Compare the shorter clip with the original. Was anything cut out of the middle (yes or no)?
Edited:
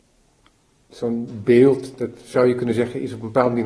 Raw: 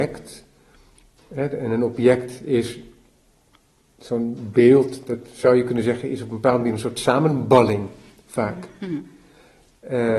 no